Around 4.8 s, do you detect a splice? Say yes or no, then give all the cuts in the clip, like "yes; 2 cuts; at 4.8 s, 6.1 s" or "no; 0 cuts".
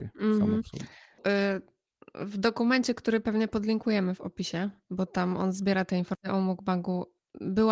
no; 1 cut; at 1.2 s